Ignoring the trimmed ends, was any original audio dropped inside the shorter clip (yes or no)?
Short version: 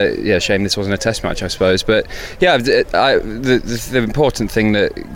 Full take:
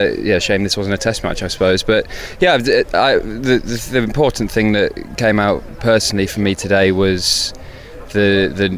no